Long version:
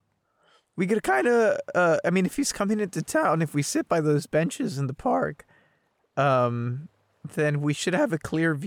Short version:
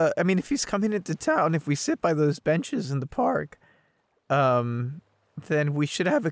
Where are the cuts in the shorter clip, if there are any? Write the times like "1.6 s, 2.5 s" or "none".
none

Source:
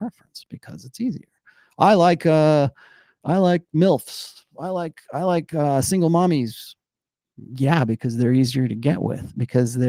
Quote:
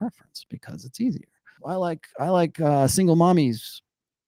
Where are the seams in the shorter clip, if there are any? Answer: 1.6 s

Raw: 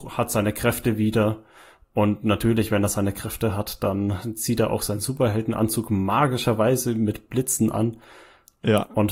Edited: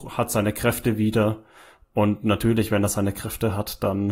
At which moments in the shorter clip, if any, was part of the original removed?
none

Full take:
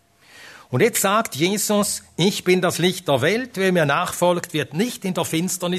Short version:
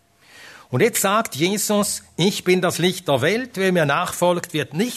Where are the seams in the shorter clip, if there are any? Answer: none

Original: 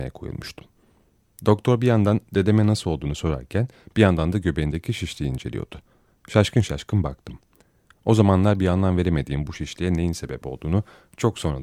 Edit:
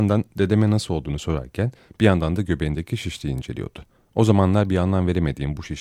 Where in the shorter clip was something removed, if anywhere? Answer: 4.0 s

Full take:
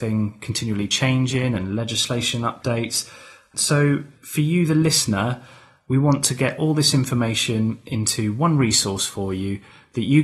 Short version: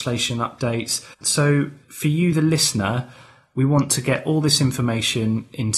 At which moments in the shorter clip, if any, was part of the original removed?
1.1 s

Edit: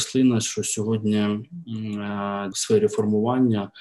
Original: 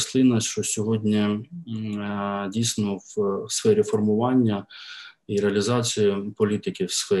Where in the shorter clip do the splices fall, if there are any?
2.5 s

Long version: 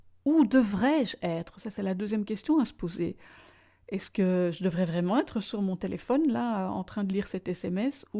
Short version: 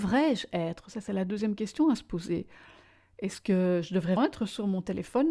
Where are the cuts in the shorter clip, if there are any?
4.2 s

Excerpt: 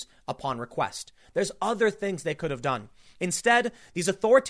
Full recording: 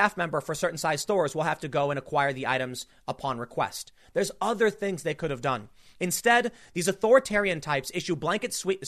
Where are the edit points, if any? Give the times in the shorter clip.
none

